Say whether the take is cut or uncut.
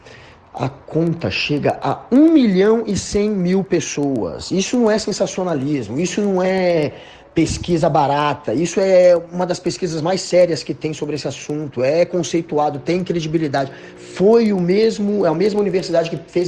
uncut